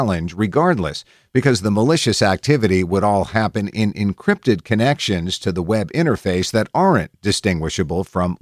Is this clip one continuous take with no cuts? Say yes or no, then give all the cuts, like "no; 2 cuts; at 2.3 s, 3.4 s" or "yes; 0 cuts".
yes; 0 cuts